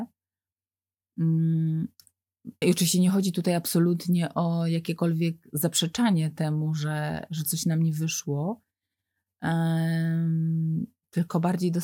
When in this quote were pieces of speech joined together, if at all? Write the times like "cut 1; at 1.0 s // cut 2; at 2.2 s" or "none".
cut 1; at 2.6 s